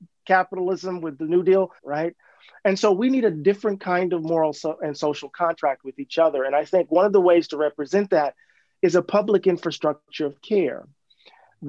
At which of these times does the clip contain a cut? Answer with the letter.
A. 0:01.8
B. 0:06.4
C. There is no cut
A